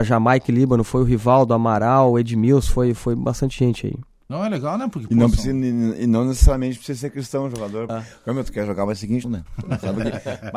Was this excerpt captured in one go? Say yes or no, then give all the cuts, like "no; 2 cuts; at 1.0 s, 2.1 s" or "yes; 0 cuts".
no; 2 cuts; at 7.9 s, 9.2 s